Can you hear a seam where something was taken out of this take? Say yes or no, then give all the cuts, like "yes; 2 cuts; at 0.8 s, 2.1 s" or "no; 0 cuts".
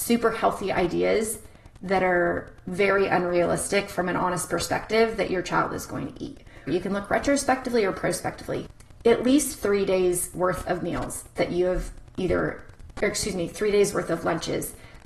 yes; 1 cut; at 6.7 s